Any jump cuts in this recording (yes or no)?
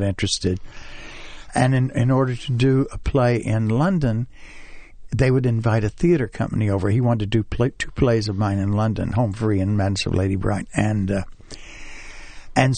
no